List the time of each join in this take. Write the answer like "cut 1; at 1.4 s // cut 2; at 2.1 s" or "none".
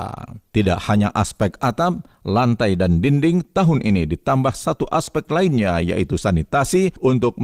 none

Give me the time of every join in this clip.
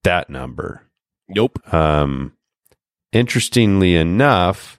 none

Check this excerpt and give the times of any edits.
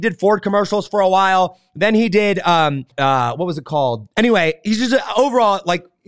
cut 1; at 2.9 s // cut 2; at 4.1 s

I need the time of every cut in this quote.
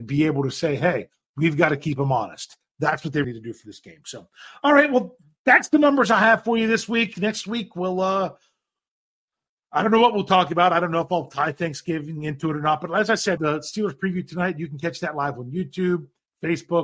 cut 1; at 3.2 s // cut 2; at 13.4 s

